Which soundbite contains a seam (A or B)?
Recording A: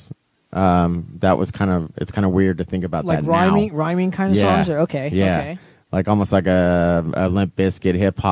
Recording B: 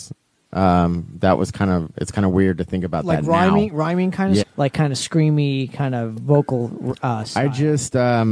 B